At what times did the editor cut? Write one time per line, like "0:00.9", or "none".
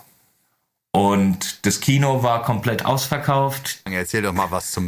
0:03.9

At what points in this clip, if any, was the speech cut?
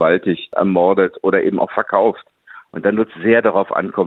0:02.6

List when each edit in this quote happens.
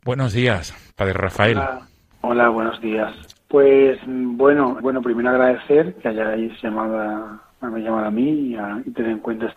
0:03.4
0:04.8

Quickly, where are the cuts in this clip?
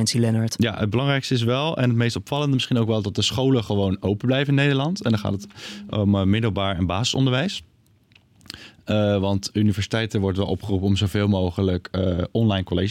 none

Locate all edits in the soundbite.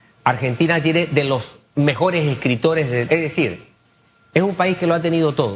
0:03.1

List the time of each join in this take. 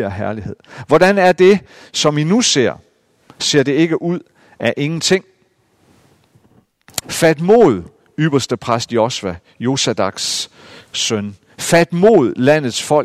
0:07.0

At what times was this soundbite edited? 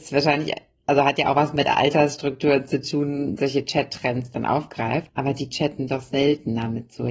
0:03.4

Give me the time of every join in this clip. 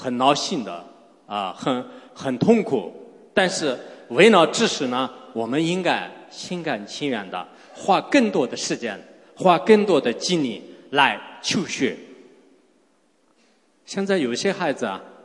none

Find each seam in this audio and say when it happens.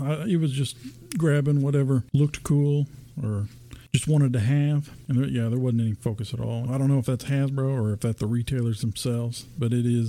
0:06.7
0:08.2

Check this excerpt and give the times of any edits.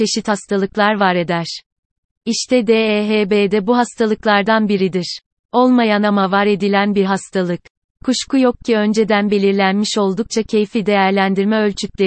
none

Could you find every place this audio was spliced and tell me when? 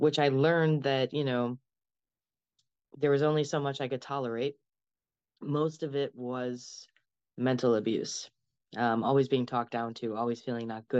none

